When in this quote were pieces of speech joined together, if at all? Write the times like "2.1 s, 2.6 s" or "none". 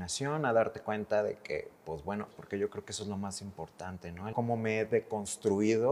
2.3 s, 4.3 s